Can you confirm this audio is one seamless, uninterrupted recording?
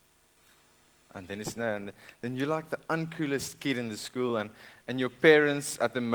yes; 0 cuts

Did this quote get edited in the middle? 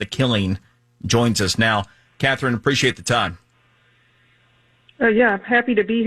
no; 0 cuts

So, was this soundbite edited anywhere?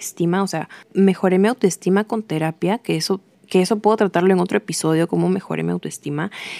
no; 0 cuts

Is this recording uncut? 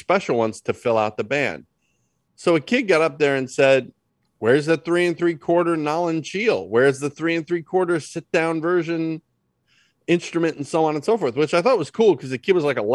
yes; 0 cuts

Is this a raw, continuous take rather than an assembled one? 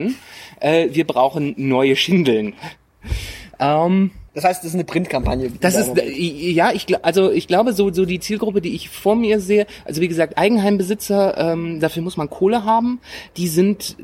no; 1 cut; at 4.3 s

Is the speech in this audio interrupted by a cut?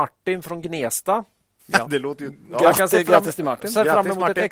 no; 0 cuts

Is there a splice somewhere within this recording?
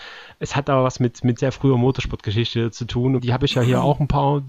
yes; 2 cuts; at 1.4 s, 3.2 s

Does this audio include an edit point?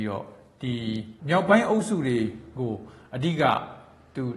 yes; 1 cut; at 1.2 s

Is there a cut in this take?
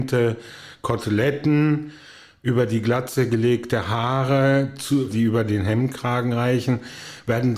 yes; 1 cut; at 5.1 s

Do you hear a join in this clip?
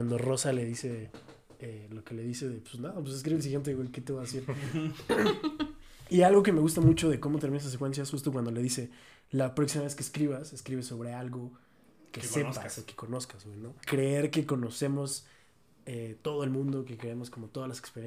yes; 1 cut; at 13.8 s

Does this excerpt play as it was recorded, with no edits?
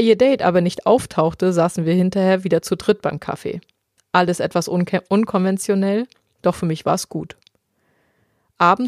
yes; 0 cuts

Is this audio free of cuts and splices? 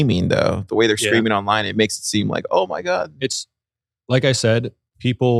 yes; 0 cuts

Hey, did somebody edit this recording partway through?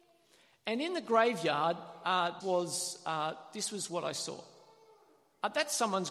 yes; 1 cut; at 2.4 s

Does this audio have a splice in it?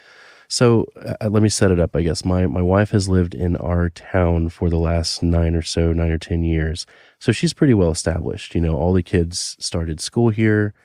no; 0 cuts

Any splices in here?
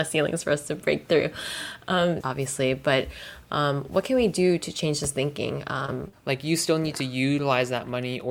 yes; 2 cuts; at 2.2 s, 6.1 s

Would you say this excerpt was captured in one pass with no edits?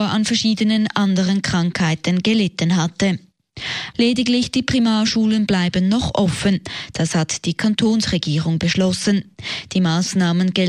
no; 1 cut; at 3.9 s

